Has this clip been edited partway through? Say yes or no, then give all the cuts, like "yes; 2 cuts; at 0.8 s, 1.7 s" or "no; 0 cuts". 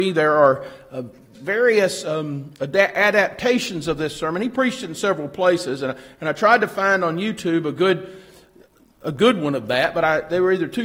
yes; 1 cut; at 1.3 s